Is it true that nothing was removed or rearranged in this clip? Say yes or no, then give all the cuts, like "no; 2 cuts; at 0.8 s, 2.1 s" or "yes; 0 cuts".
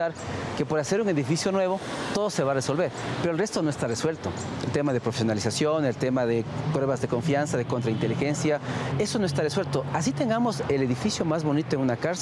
no; 1 cut; at 8.9 s